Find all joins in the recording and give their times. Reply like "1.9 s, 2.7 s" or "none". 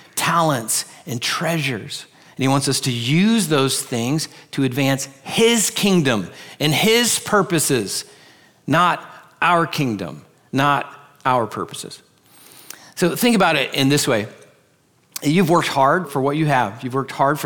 16.0 s